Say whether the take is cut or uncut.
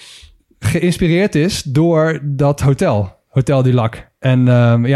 uncut